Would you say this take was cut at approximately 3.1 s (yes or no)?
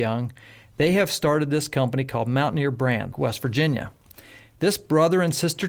yes